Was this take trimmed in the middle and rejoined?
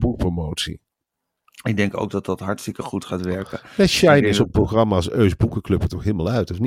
no; 0 cuts

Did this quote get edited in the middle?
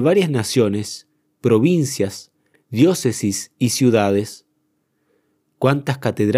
no; 0 cuts

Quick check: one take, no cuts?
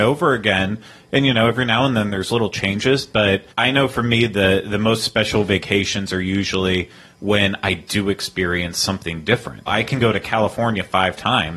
no; 2 cuts; at 3.5 s, 9.7 s

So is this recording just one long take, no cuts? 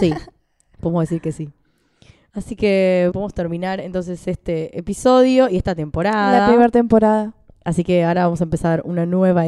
no; 1 cut; at 3.1 s

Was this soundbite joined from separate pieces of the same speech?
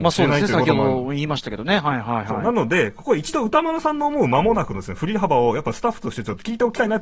no; 0 cuts

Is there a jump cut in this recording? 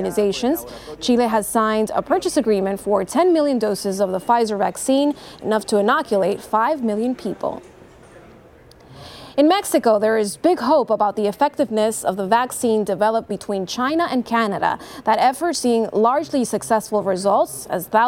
no; 0 cuts

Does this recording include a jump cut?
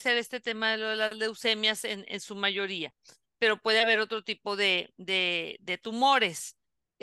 no; 0 cuts

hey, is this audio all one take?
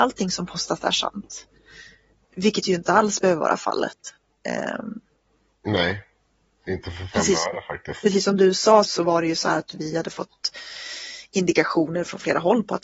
no; 1 cut; at 8.8 s

